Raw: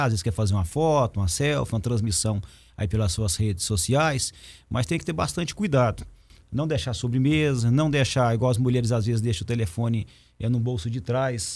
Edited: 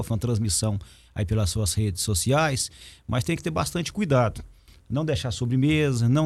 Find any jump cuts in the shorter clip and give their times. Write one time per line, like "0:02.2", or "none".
none